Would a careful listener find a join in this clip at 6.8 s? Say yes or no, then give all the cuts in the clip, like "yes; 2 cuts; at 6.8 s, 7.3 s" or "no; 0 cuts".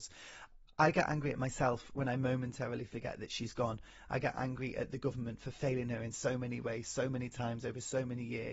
no; 0 cuts